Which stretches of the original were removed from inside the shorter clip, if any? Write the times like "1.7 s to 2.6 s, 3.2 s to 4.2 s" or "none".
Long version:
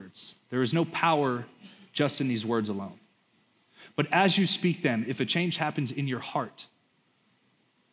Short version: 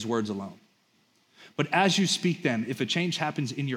none